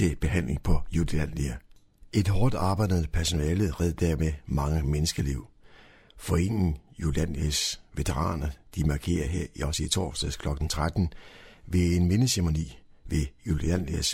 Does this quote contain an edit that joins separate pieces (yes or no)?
no